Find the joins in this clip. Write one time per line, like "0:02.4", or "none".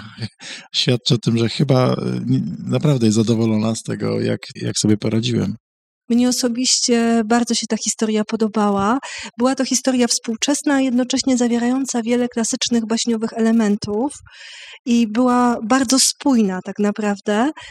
0:04.6